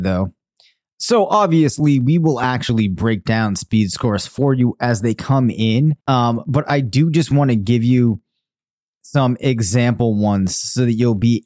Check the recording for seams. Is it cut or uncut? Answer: cut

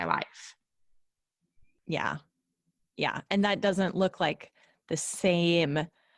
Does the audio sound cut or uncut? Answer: uncut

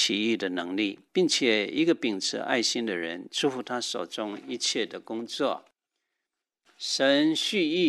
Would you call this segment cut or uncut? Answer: cut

